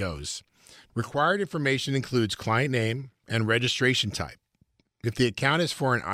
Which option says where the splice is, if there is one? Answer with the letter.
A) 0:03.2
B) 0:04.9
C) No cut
A